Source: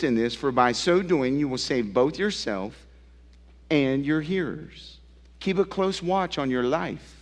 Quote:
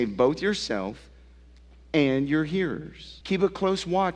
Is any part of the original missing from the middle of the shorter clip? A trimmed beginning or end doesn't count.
yes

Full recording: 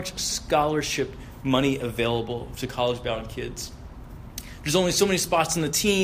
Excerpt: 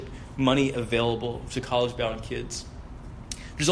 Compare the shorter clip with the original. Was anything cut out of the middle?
no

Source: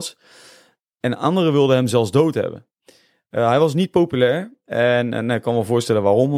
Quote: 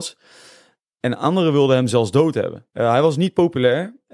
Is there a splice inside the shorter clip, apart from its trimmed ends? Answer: yes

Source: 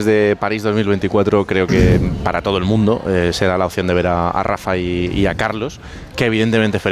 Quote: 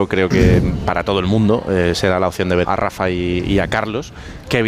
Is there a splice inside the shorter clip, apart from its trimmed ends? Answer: yes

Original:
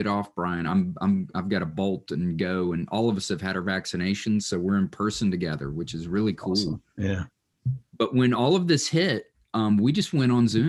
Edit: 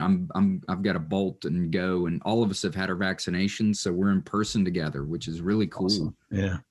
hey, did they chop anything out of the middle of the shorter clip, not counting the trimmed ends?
no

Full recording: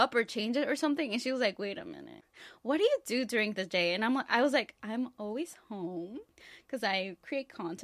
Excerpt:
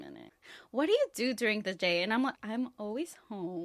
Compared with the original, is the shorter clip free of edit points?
no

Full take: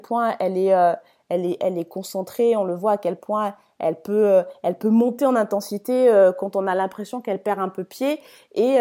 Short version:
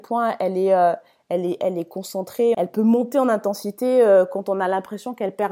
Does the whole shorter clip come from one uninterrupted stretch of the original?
no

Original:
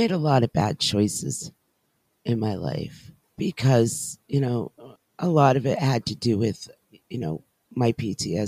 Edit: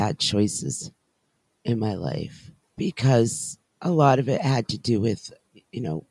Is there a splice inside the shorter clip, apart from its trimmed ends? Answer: yes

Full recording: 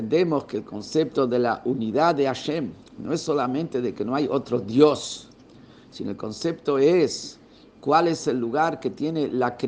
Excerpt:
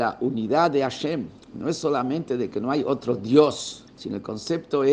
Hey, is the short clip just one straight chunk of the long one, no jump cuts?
no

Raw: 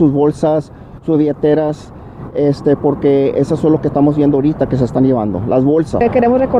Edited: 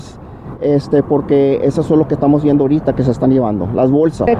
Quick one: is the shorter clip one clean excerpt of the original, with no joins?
yes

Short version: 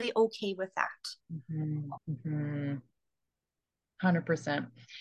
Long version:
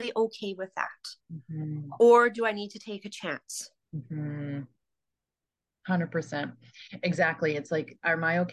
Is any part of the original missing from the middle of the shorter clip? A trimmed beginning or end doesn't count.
yes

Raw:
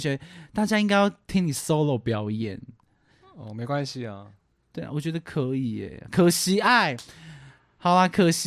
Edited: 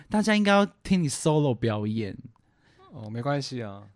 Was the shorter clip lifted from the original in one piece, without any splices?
yes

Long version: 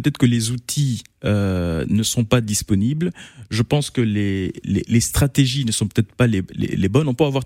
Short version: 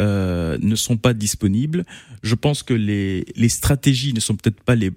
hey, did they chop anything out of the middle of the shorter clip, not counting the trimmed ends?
yes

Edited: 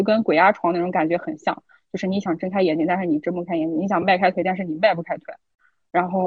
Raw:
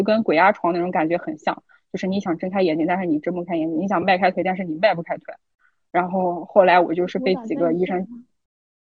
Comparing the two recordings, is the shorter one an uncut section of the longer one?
yes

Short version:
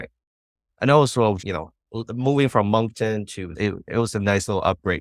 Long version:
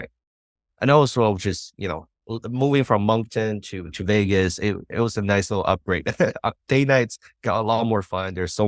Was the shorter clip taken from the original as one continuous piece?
no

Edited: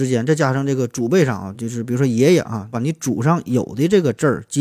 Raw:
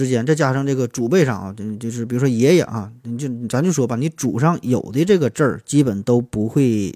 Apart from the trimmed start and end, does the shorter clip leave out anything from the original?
yes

